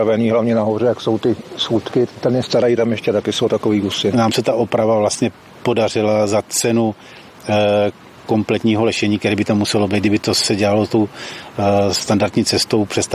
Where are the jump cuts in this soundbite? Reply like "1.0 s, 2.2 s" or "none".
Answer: 2.1 s, 4.1 s

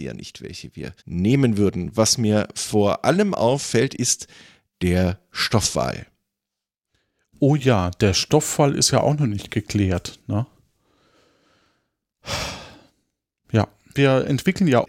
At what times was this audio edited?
1.0 s

